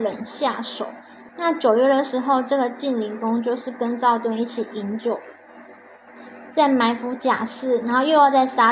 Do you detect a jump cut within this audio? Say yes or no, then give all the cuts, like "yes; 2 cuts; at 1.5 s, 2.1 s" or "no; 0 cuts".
yes; 1 cut; at 1.3 s